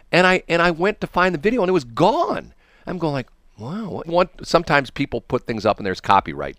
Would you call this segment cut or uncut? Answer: cut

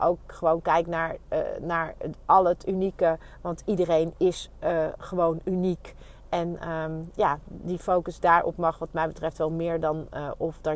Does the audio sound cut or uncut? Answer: uncut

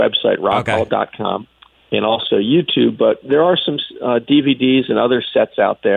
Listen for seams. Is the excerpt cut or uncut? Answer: uncut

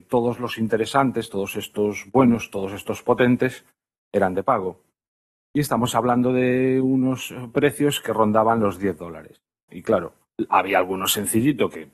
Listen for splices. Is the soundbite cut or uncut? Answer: cut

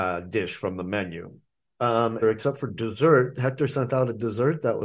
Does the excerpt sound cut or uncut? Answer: cut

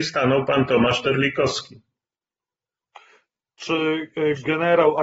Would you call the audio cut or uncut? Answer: uncut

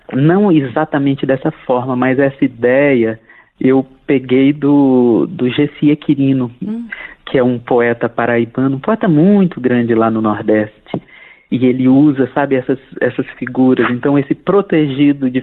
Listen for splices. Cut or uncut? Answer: uncut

